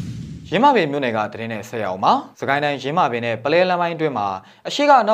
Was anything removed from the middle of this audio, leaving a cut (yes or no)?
yes